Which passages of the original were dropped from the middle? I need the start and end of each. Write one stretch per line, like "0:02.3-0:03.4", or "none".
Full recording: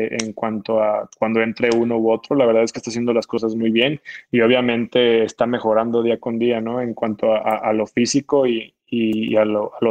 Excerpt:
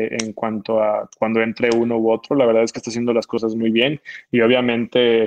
none

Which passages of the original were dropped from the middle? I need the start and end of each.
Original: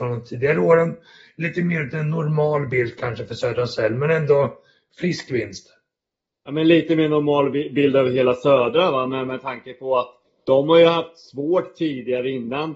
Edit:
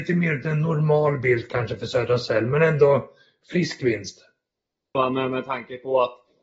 0:06.4-0:08.9

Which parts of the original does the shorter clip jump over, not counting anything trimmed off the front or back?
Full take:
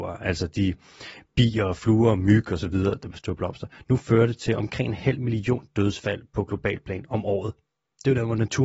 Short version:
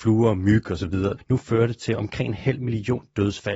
0:03.0-0:03.8

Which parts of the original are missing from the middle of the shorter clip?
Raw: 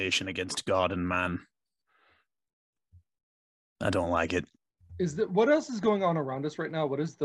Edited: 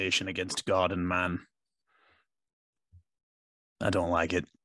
none

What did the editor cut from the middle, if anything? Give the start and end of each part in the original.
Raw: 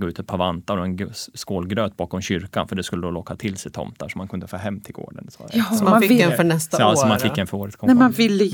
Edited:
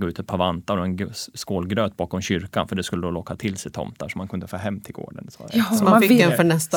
none

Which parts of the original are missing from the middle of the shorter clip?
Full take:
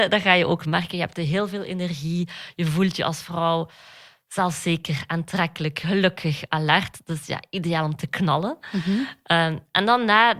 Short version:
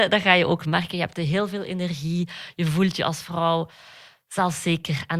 none

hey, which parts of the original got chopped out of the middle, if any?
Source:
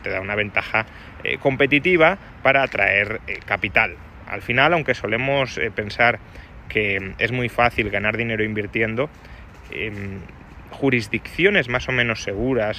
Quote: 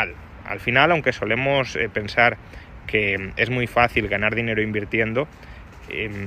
none

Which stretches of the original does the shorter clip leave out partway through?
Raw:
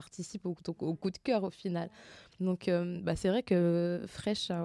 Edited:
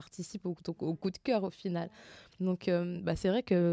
none

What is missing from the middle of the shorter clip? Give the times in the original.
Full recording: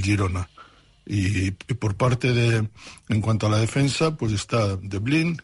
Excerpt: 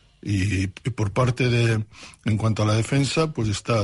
none

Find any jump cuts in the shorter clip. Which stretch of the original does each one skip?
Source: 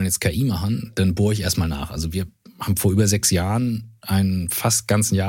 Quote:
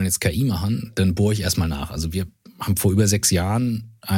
none

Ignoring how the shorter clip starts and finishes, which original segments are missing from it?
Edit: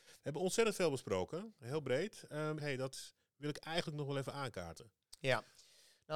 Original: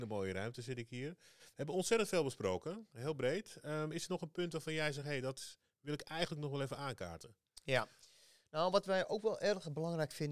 0:03.9-0:05.0

